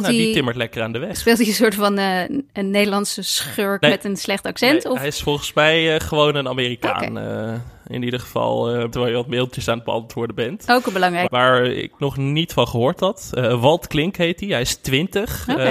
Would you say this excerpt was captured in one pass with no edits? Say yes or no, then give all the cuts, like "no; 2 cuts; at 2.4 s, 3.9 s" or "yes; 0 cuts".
no; 3 cuts; at 3.8 s, 8.9 s, 11.3 s